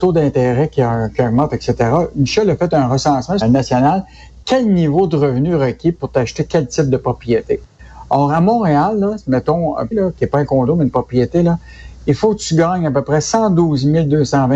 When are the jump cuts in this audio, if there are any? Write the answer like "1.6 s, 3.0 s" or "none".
3.4 s, 9.9 s